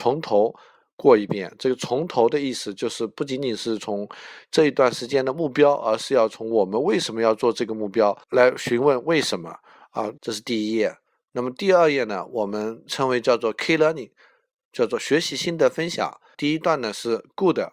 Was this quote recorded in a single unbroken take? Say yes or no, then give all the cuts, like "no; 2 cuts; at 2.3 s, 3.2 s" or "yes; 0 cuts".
no; 3 cuts; at 8.2 s, 10.2 s, 16.3 s